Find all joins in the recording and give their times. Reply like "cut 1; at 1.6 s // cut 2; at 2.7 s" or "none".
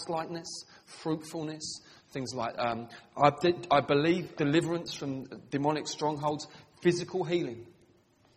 cut 1; at 4.3 s